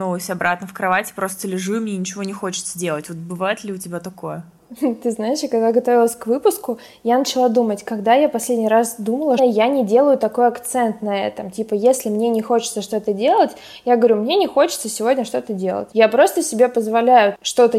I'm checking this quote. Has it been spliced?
yes; 2 cuts; at 9.4 s, 15.9 s

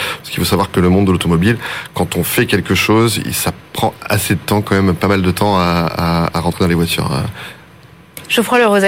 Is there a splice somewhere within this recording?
no; 0 cuts

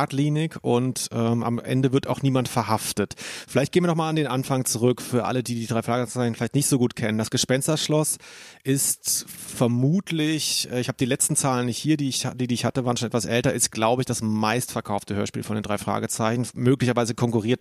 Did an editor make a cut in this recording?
no; 0 cuts

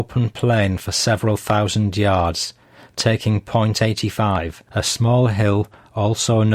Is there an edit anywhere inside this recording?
no; 0 cuts

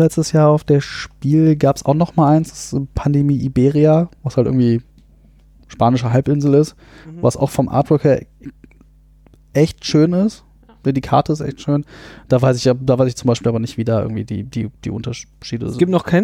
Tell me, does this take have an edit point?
no; 0 cuts

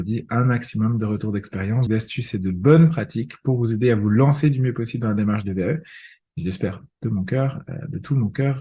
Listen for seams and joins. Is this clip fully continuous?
no; 1 cut; at 1.9 s

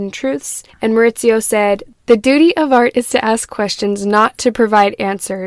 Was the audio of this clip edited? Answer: no; 0 cuts

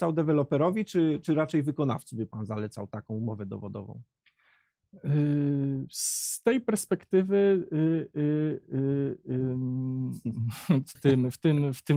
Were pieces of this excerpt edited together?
yes; 1 cut; at 10.9 s

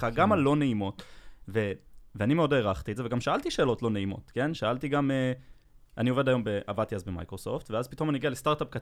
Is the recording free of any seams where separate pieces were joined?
yes; 0 cuts

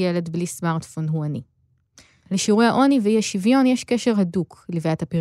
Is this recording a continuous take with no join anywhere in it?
yes; 0 cuts

